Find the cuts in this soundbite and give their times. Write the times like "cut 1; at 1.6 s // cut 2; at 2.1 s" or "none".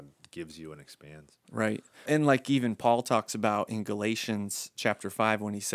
cut 1; at 2.1 s